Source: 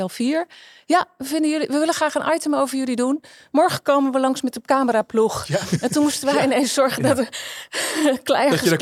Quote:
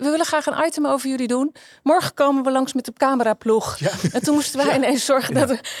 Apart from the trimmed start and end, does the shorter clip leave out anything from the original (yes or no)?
no